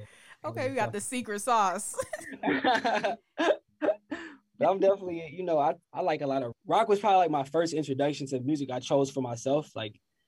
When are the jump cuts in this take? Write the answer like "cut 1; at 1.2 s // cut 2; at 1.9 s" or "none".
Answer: cut 1; at 6.5 s